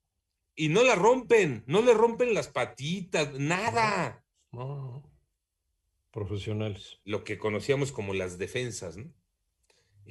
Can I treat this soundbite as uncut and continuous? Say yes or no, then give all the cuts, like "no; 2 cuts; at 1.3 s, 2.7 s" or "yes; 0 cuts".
no; 1 cut; at 7.0 s